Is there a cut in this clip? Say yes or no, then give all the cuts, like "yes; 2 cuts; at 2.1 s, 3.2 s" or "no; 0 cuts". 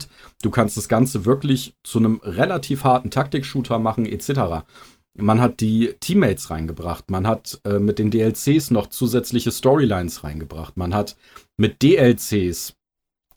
no; 0 cuts